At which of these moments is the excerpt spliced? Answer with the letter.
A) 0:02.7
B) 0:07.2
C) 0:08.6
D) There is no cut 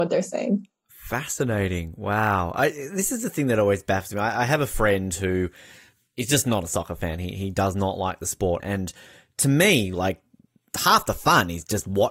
C